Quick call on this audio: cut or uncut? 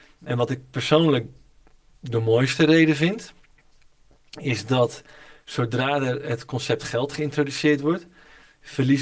uncut